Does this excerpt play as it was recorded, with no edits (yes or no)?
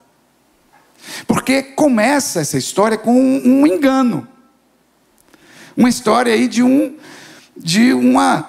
yes